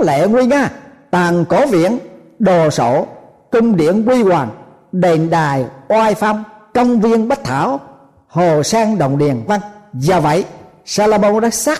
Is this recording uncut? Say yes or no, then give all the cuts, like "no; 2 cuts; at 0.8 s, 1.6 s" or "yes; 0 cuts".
no; 1 cut; at 9.5 s